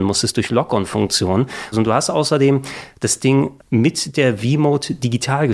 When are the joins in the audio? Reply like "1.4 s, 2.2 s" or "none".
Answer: 1.7 s, 3.6 s